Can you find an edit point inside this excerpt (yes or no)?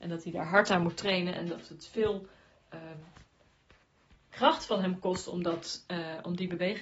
no